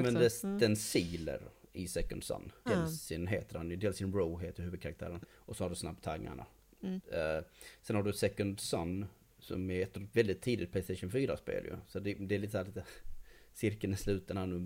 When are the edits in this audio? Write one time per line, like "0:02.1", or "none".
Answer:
0:02.7
0:05.2